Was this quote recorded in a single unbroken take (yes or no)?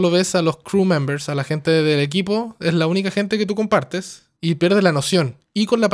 no